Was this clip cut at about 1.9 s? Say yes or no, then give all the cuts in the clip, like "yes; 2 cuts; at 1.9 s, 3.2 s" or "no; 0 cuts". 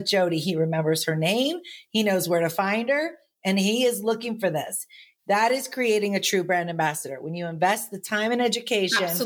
no; 1 cut; at 5.2 s